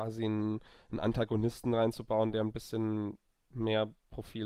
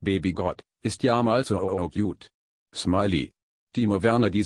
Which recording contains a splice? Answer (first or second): second